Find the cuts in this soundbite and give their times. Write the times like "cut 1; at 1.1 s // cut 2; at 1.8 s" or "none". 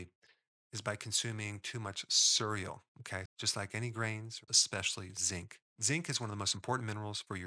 cut 1; at 3.3 s // cut 2; at 4.5 s